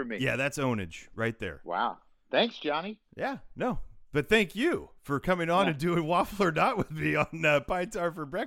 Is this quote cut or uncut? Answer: uncut